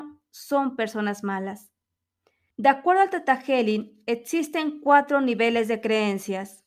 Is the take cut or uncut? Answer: cut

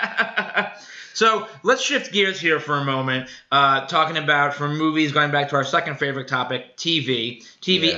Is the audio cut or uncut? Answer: uncut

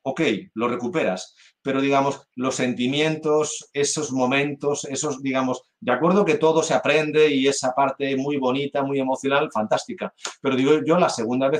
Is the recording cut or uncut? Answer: uncut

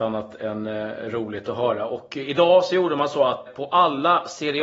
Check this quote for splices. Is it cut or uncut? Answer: cut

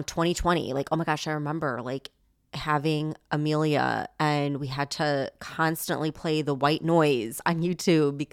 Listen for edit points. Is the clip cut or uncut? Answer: uncut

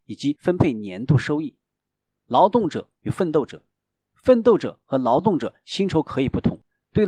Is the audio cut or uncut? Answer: cut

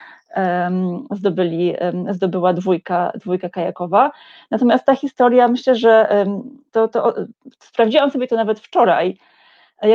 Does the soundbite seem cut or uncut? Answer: uncut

